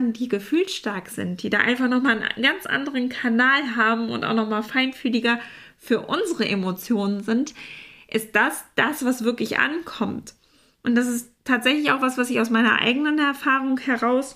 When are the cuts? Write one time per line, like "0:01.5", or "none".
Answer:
none